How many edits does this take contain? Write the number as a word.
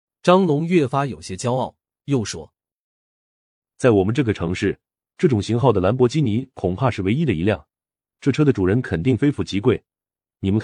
zero